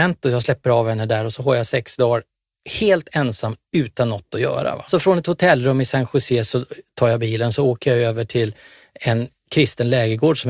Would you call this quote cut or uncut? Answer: cut